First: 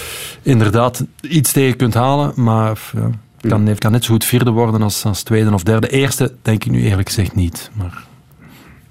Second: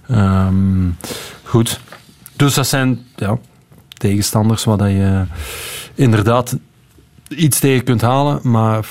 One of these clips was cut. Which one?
first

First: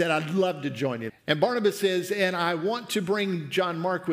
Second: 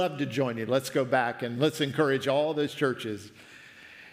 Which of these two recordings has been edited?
first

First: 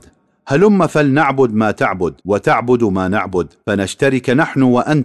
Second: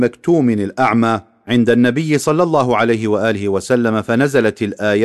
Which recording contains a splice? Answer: first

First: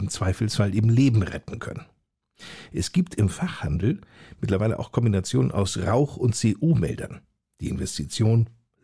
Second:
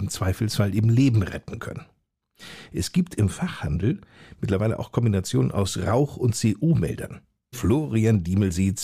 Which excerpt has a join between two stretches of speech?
second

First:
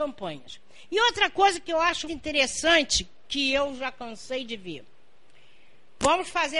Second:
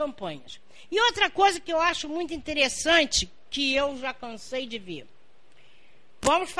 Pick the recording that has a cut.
first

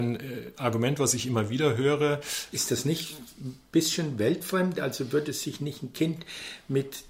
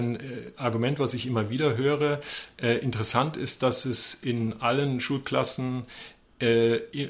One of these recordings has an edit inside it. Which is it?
first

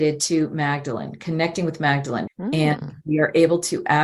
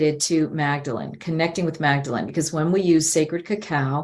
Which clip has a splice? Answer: first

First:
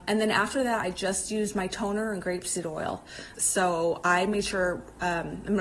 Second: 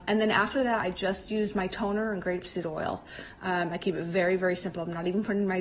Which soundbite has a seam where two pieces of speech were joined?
first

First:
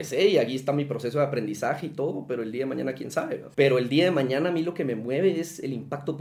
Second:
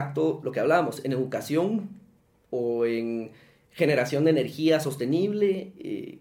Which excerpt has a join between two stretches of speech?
first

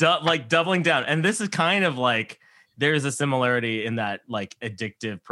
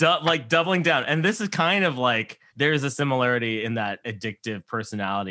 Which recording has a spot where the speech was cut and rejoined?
second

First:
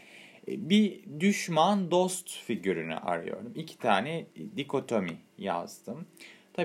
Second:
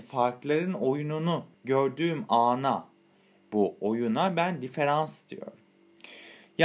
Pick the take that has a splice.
second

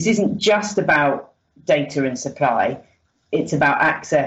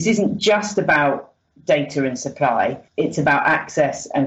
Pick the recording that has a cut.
second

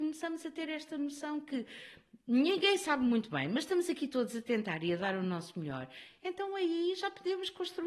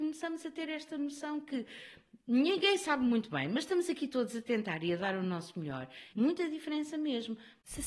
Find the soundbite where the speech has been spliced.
second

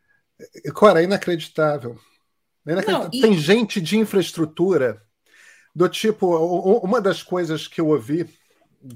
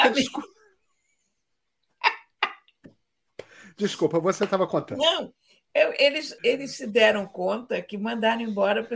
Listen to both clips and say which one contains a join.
second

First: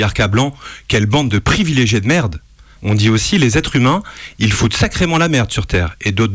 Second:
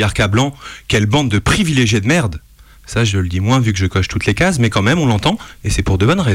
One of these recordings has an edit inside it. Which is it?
first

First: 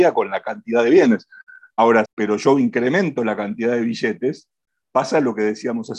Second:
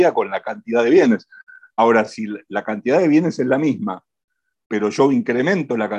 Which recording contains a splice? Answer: first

